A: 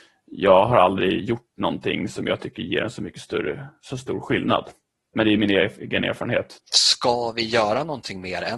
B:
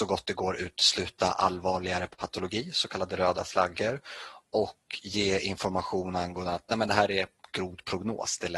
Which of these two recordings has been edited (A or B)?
A